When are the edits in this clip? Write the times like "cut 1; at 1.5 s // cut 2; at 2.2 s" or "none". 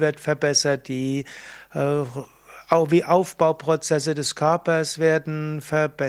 none